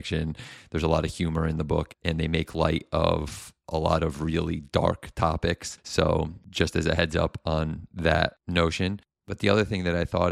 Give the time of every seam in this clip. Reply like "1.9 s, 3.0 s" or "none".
none